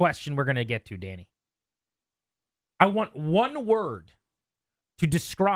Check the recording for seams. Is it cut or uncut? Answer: uncut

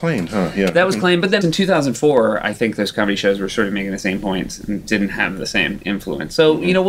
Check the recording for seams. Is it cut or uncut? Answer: cut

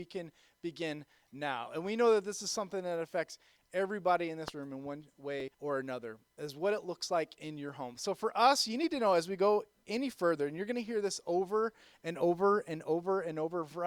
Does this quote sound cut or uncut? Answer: cut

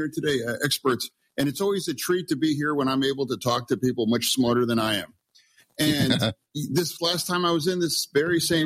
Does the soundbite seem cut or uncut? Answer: uncut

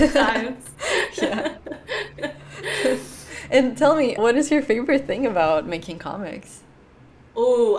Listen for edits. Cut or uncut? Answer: cut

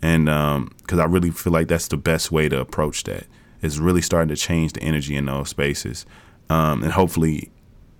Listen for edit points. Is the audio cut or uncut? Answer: uncut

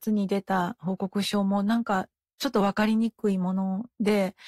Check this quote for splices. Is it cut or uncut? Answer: uncut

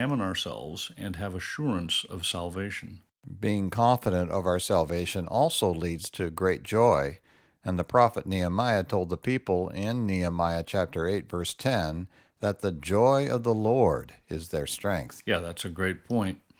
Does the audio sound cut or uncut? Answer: uncut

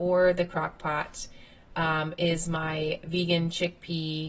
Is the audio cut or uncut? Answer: uncut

